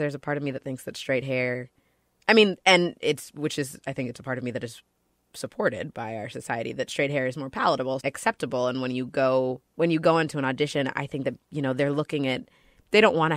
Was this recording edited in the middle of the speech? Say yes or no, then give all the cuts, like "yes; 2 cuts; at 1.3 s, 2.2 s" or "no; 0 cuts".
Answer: yes; 2 cuts; at 8.0 s, 9.7 s